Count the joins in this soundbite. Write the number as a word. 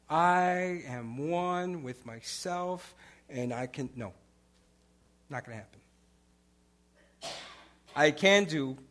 zero